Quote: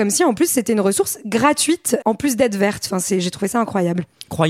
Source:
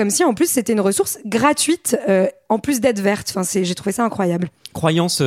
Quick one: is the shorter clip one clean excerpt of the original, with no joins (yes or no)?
no